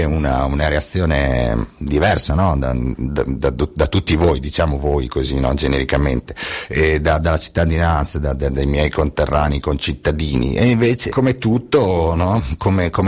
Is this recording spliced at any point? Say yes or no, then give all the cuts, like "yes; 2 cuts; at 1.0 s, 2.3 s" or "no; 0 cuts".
yes; 1 cut; at 11.1 s